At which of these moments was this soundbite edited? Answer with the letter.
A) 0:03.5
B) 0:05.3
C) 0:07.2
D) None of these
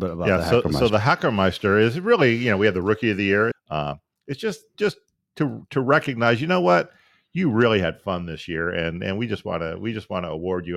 A